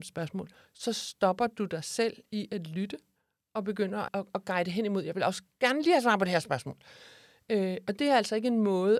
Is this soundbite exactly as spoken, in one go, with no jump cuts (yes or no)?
no